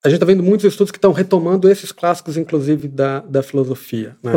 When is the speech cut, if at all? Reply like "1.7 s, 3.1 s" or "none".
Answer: none